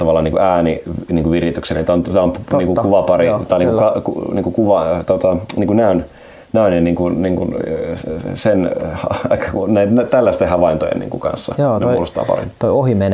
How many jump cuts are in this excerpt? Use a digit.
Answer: 0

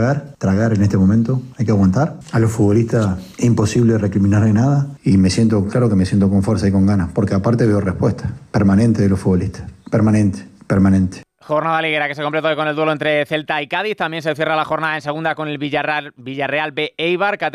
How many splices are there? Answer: 0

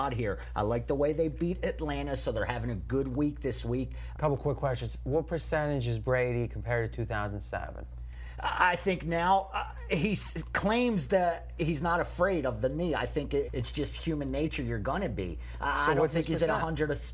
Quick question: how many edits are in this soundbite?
2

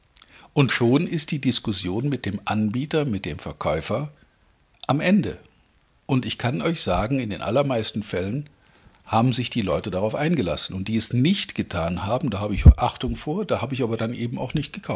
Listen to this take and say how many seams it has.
0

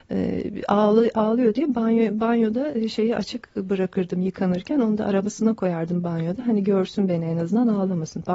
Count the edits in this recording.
0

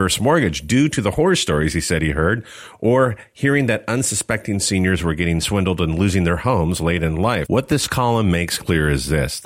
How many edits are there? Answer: 1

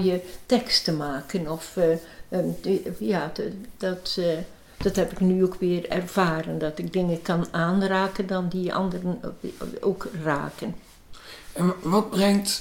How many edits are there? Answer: 0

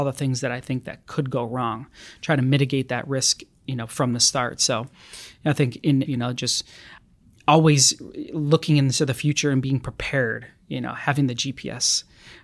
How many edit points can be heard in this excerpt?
1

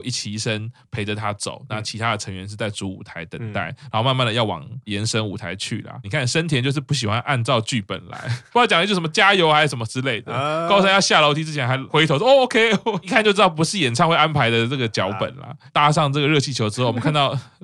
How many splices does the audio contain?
1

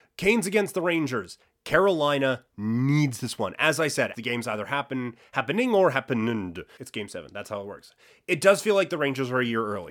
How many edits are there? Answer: 2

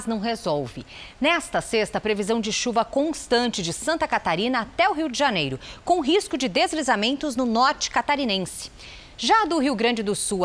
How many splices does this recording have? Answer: 0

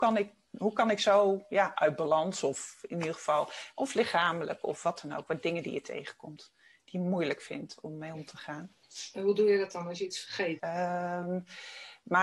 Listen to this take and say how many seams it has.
1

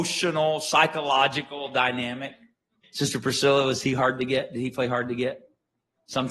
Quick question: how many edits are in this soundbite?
1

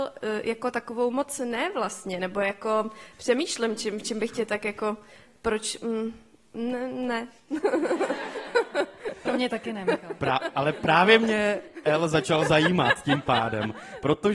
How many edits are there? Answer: 0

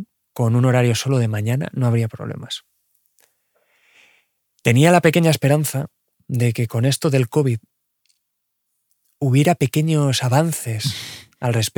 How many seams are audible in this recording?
0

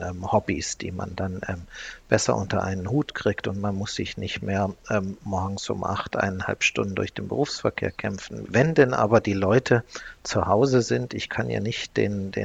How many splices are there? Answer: 1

